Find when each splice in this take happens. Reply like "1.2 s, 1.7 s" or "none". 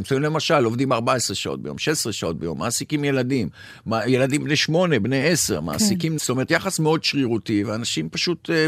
6.2 s